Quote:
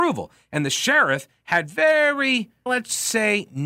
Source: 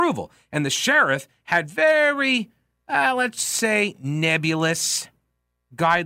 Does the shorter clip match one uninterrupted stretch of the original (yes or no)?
no